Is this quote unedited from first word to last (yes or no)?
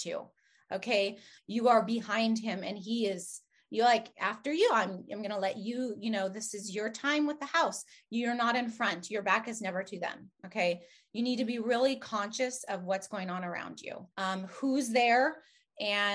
no